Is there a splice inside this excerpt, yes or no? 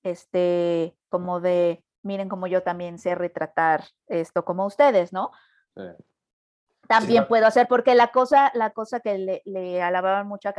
no